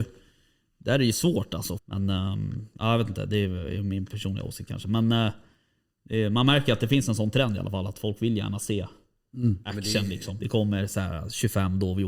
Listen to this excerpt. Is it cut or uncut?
cut